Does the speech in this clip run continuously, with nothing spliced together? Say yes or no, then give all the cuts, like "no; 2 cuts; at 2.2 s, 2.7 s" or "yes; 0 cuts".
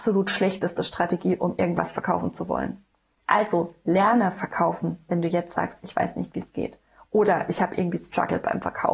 yes; 0 cuts